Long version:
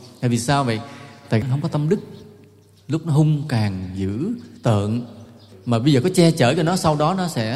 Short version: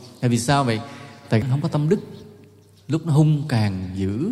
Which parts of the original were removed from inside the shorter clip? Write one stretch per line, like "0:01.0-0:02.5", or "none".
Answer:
none